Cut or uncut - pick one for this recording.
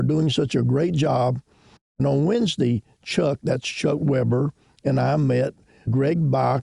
uncut